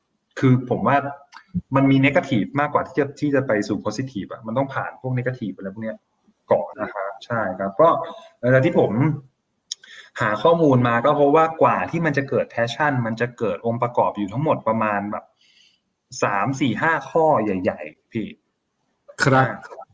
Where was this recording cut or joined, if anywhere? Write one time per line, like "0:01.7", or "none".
0:06.7